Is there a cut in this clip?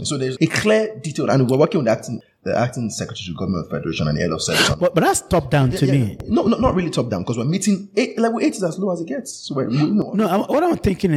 no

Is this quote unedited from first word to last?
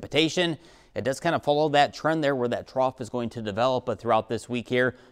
yes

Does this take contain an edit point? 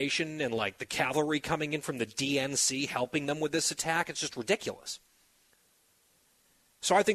no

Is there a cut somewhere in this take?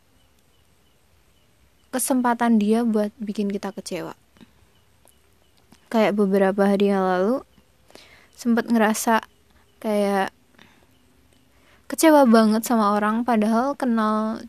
no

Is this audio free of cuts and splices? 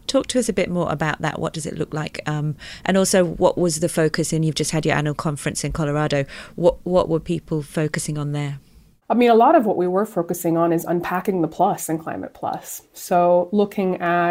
yes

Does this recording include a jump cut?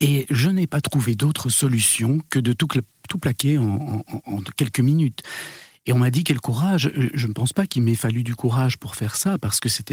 no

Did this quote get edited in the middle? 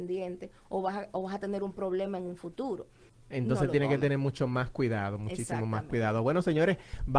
yes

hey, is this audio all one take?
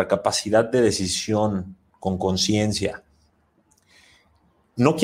yes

